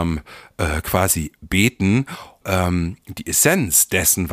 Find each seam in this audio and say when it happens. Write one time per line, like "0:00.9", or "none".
0:02.4

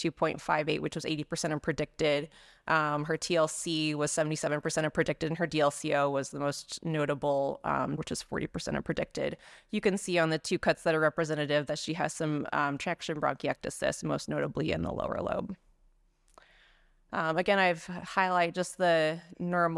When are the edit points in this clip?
0:08.0

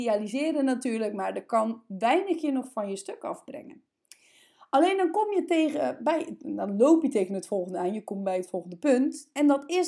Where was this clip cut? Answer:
none

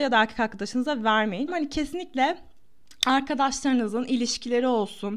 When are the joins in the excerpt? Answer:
0:01.5

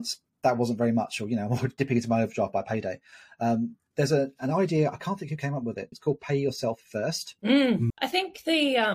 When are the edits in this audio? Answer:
0:05.9
0:07.9

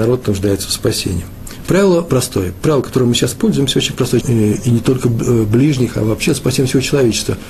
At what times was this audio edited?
0:02.1
0:04.2

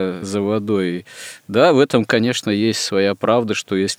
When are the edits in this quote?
none

